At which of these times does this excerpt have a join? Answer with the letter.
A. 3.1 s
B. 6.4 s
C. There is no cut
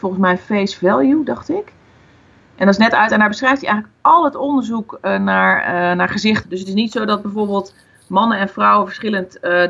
B